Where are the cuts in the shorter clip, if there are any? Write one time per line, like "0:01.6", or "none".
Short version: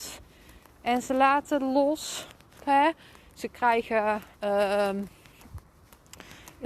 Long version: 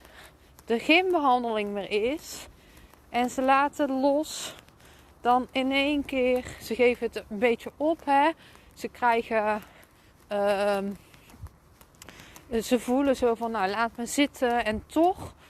0:02.6
0:04.3